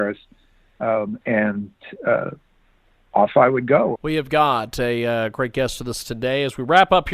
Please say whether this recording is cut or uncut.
cut